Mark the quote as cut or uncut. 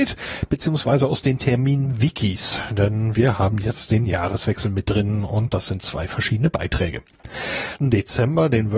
cut